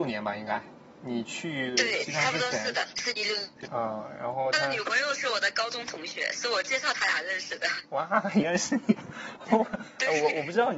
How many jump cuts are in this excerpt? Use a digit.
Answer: 1